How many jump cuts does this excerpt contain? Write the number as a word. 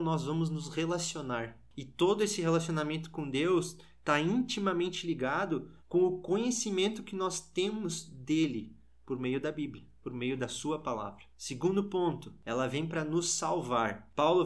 one